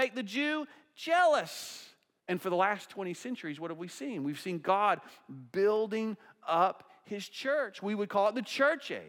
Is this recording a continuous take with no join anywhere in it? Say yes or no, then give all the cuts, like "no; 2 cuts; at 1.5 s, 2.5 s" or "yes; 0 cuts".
no; 1 cut; at 2.2 s